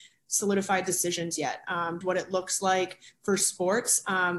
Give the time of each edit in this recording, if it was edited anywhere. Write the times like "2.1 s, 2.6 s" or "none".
2.0 s